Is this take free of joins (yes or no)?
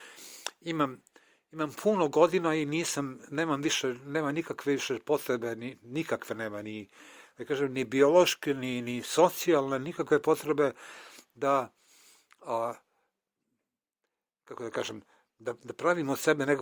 yes